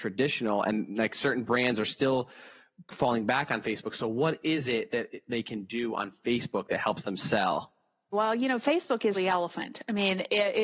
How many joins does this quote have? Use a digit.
2